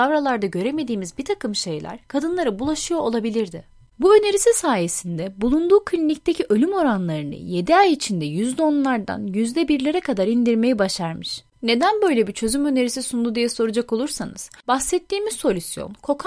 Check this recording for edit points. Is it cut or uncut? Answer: cut